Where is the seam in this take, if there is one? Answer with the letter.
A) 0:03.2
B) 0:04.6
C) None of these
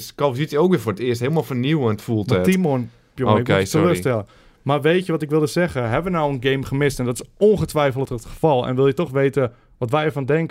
A